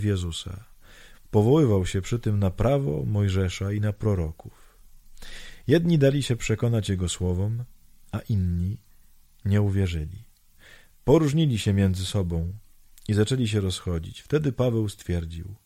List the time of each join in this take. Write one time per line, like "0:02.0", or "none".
none